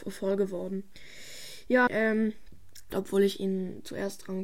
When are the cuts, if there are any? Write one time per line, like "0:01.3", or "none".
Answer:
0:01.9
0:02.9

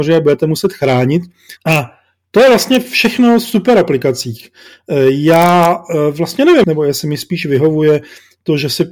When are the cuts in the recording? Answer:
0:01.6
0:06.6

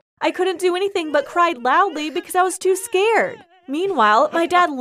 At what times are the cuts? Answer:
none

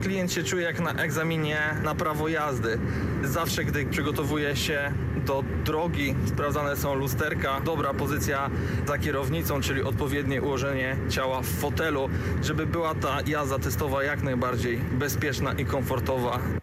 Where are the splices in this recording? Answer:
0:07.6

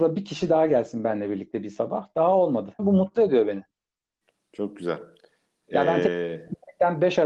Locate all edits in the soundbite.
0:02.8

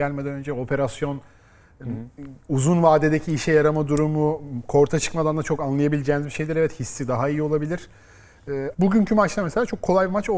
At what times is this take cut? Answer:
0:08.7

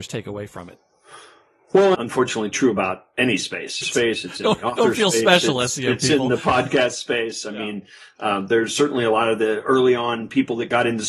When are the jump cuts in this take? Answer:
0:01.9
0:03.8

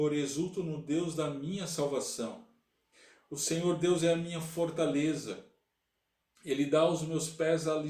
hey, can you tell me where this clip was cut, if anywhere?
none

